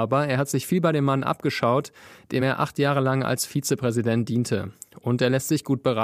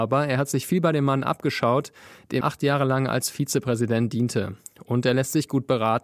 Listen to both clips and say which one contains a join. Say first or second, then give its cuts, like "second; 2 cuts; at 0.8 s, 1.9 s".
second; 1 cut; at 2.4 s